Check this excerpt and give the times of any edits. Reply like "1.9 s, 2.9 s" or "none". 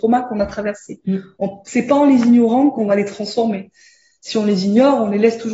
none